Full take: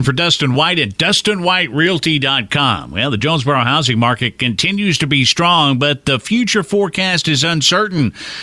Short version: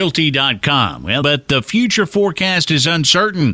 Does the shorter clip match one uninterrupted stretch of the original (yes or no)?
no